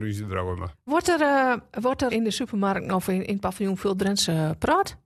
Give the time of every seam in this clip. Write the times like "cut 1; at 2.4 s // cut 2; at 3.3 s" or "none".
cut 1; at 2.1 s